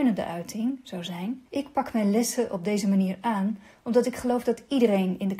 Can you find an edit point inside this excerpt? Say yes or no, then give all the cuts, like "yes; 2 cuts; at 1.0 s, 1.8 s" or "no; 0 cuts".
yes; 1 cut; at 1.5 s